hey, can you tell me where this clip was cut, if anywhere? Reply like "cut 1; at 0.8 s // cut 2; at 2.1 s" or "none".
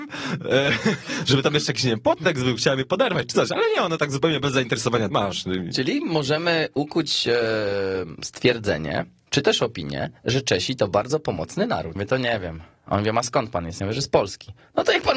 cut 1; at 5.1 s // cut 2; at 12.0 s